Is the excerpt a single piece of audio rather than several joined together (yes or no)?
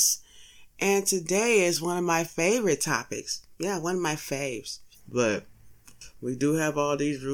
no